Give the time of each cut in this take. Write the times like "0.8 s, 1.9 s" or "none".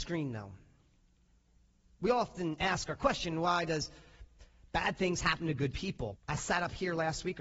1.8 s, 6.1 s